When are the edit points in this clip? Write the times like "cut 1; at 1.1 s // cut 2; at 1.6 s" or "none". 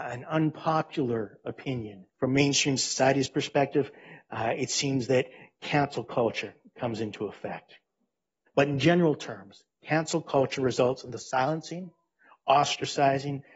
cut 1; at 2.1 s // cut 2; at 8.5 s